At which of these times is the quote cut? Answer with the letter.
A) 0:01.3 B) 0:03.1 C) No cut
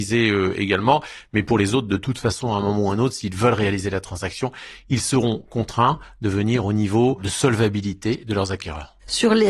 C